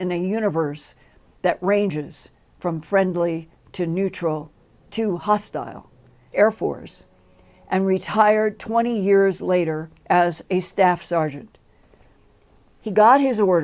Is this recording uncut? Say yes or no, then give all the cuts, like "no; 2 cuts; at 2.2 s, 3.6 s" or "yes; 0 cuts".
no; 2 cuts; at 6.3 s, 10.0 s